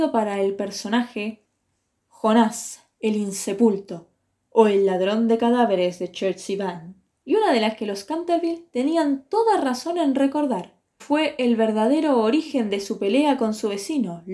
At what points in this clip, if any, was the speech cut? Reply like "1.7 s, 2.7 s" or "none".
7.2 s, 11.0 s